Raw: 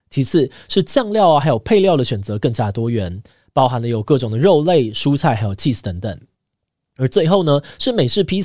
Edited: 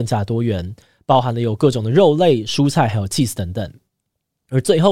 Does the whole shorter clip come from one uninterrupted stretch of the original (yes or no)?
yes